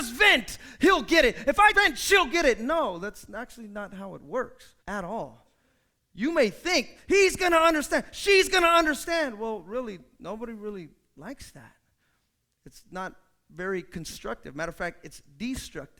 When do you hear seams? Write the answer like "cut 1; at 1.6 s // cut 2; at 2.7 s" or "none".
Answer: cut 1; at 1.7 s // cut 2; at 4.8 s